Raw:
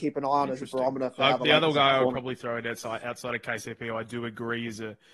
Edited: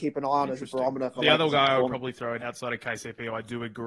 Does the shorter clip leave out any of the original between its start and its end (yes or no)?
yes